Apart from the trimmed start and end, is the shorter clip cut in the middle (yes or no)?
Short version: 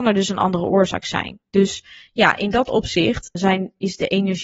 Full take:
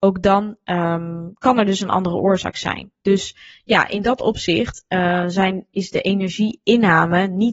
yes